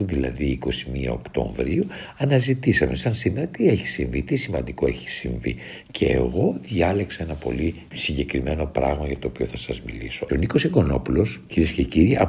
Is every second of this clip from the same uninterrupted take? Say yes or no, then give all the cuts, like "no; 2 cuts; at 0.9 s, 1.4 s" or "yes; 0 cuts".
no; 1 cut; at 10.3 s